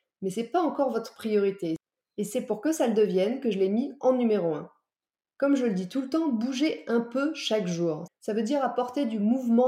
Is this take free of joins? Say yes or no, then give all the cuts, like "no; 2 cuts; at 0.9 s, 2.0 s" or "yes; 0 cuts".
no; 1 cut; at 8.1 s